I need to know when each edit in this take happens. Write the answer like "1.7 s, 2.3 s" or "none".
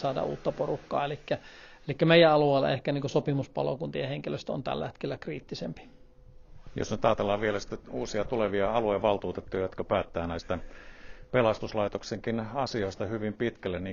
none